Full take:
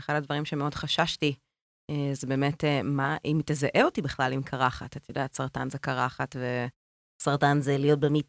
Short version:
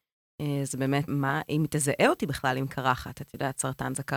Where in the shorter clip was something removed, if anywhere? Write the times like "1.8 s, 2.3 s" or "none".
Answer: 1.1 s